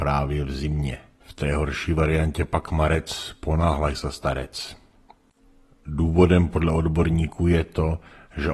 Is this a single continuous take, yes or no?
no